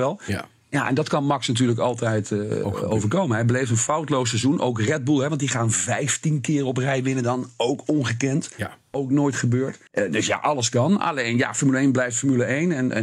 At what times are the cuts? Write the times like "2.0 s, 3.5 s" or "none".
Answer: 9.9 s